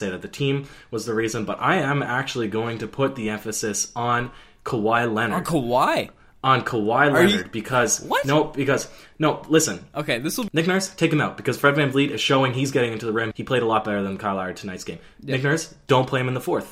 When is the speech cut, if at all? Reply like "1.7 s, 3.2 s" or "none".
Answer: 10.5 s, 13.3 s